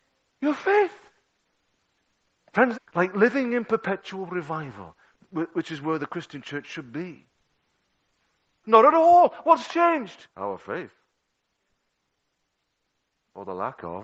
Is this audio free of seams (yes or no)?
no